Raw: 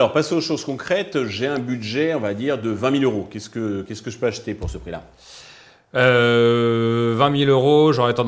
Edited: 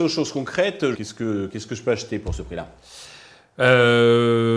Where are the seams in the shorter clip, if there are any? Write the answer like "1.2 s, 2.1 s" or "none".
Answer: 0.9 s